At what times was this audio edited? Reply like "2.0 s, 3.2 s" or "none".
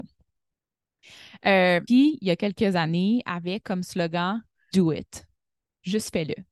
1.9 s, 4.7 s